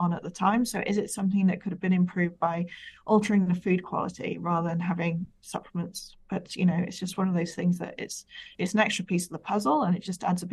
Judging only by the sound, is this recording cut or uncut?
uncut